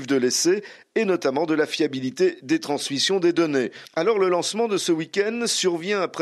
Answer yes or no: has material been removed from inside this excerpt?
no